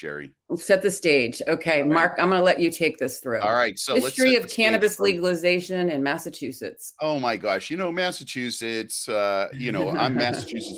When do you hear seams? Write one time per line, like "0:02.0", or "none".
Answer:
none